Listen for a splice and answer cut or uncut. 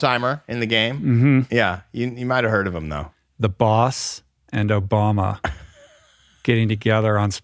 uncut